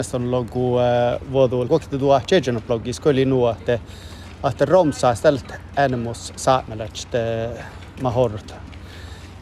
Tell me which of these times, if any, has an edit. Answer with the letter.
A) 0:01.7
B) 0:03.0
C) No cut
A